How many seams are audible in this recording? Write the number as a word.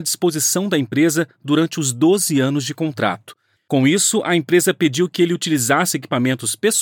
one